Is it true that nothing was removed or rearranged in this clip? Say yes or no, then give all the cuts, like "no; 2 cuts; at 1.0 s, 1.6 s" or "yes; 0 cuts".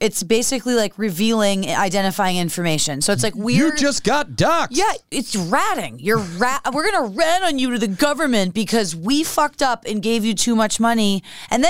yes; 0 cuts